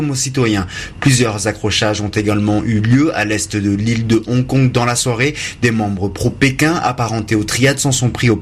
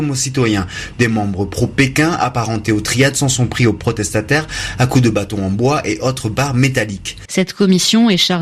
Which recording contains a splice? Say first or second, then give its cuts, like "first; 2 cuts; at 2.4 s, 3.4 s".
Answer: second; 2 cuts; at 0.9 s, 7.2 s